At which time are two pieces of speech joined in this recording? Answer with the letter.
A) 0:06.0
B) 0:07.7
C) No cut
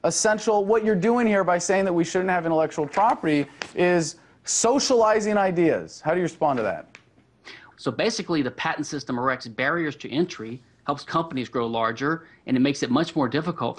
B